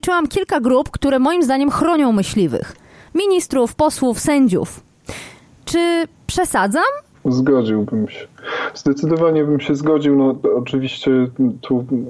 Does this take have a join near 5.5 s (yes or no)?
no